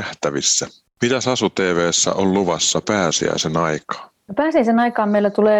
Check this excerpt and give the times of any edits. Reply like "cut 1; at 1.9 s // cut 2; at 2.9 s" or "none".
none